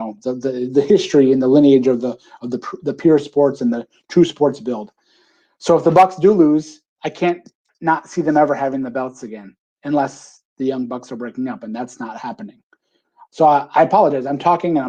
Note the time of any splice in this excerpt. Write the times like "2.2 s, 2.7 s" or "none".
none